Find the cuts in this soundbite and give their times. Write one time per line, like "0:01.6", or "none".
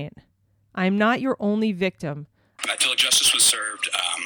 0:02.6